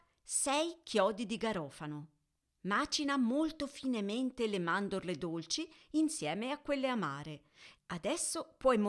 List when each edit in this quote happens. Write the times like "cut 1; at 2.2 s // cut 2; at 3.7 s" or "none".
cut 1; at 2.4 s // cut 2; at 7.8 s